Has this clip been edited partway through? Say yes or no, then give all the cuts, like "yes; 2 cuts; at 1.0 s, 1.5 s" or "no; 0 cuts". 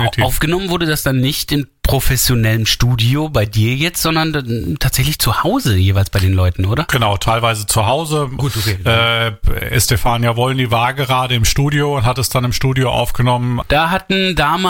yes; 2 cuts; at 8.4 s, 13.6 s